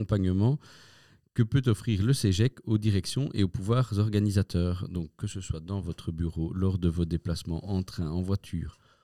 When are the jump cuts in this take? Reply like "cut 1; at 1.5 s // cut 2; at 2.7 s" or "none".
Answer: none